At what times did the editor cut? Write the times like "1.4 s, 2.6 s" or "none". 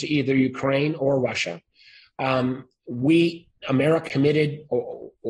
4.1 s